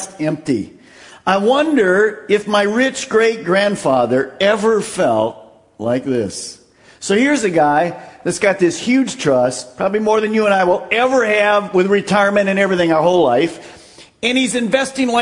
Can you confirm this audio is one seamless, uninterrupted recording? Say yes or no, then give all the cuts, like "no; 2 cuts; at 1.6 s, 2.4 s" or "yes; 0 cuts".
yes; 0 cuts